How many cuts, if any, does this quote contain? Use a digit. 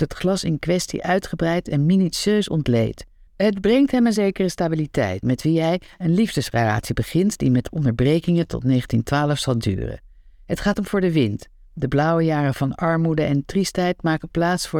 2